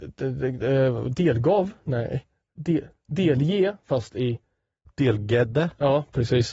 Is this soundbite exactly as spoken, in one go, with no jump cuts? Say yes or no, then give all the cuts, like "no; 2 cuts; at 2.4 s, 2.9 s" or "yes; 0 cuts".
yes; 0 cuts